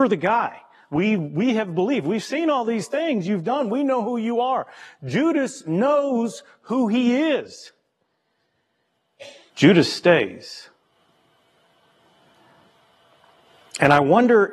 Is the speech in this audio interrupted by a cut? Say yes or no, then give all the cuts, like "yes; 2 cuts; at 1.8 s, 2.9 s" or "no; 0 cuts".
yes; 1 cut; at 9.5 s